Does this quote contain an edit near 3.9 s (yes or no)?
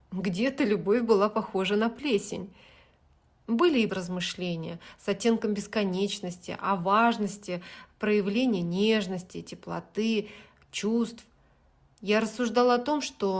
yes